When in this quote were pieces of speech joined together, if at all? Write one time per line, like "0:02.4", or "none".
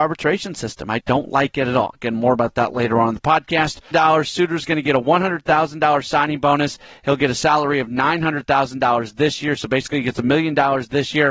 0:01.0
0:03.9